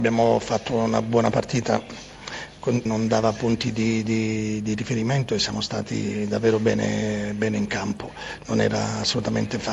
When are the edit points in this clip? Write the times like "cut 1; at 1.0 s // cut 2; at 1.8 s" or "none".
cut 1; at 2.9 s